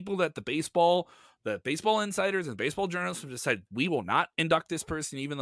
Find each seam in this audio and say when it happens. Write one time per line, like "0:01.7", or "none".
none